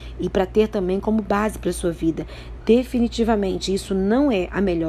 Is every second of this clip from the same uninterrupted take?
yes; 0 cuts

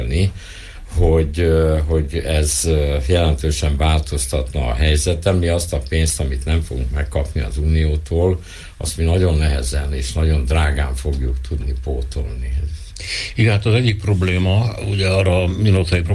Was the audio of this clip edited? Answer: no; 0 cuts

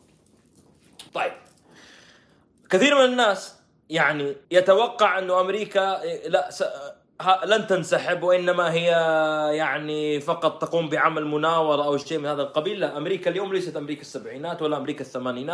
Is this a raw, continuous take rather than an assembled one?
no; 2 cuts; at 1.1 s, 4.4 s

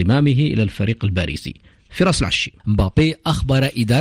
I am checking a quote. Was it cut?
yes; 1 cut; at 2.6 s

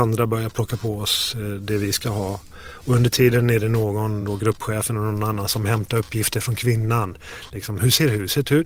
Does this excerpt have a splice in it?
no; 0 cuts

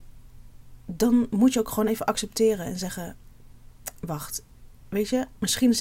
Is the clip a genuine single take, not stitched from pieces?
yes; 0 cuts

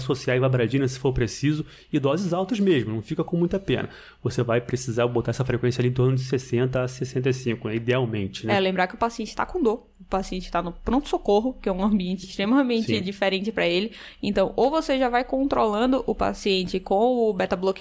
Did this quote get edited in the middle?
no; 0 cuts

